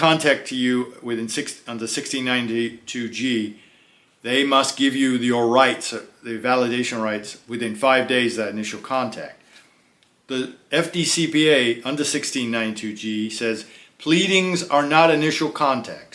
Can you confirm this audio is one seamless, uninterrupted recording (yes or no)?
yes